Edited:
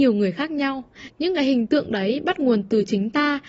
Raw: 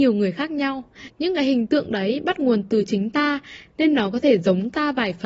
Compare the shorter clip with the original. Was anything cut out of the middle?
no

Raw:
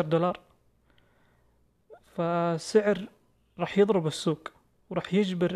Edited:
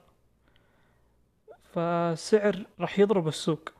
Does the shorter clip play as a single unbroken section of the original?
no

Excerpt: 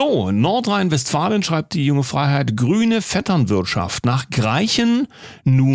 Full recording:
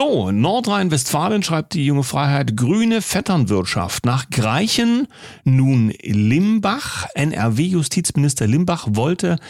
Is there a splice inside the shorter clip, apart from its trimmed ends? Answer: no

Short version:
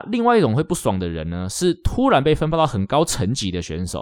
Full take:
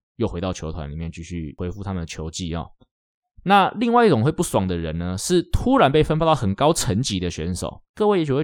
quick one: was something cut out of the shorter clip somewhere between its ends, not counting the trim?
no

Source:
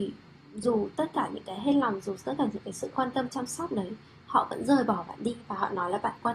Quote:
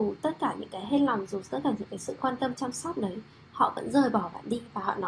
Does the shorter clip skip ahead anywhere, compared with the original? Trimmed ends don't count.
no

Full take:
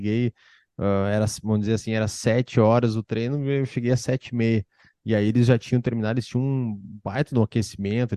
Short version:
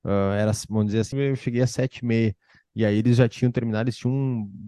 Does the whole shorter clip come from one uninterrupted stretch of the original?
no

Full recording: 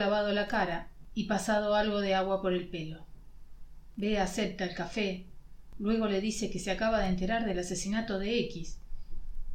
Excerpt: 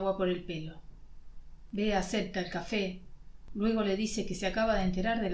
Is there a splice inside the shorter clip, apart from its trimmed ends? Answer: no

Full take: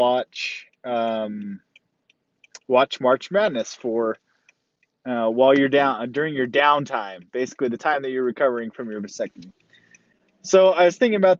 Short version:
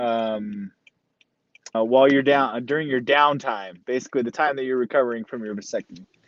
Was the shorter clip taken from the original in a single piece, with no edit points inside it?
no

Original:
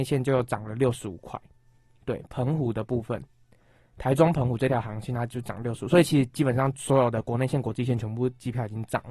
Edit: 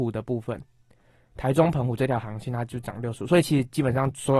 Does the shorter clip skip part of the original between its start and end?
no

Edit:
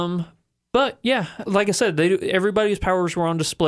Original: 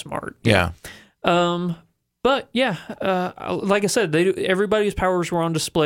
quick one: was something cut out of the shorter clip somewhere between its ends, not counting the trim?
yes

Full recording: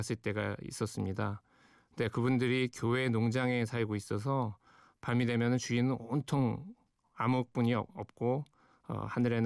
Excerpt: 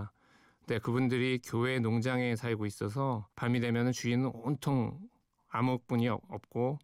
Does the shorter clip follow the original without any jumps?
no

